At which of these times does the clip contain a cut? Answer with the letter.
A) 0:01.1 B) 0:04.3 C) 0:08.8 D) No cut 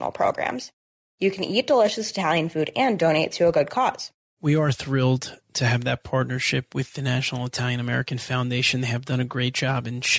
B